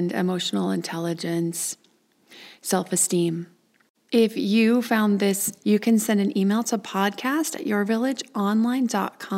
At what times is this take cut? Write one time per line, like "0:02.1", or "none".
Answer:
0:05.6

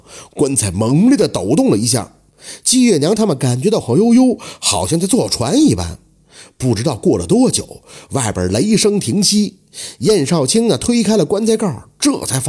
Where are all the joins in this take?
0:03.8

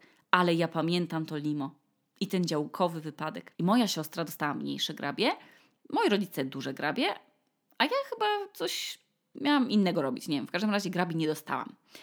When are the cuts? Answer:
0:03.5

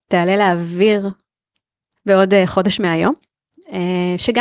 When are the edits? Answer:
0:02.0

